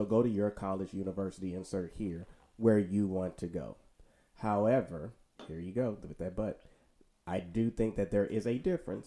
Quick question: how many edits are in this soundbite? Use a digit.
0